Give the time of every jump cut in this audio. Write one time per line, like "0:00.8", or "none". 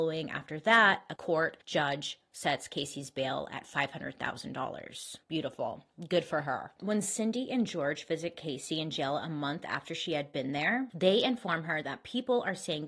0:05.2